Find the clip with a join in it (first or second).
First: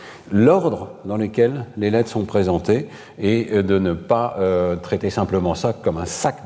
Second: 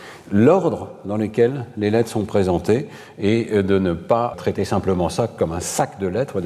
second